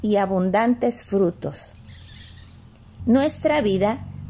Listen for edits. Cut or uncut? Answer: cut